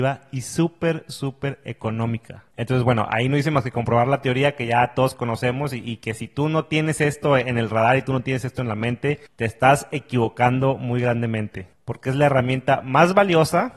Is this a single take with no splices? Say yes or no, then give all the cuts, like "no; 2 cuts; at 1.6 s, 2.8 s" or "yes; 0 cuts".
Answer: no; 1 cut; at 2.5 s